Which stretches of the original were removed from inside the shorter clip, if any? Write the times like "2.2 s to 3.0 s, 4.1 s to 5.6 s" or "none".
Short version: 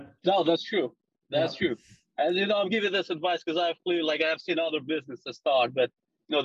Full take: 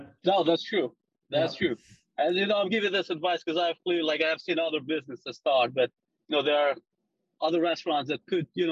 none